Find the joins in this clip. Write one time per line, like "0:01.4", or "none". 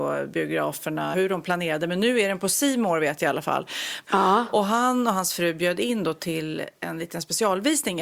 0:01.1
0:04.0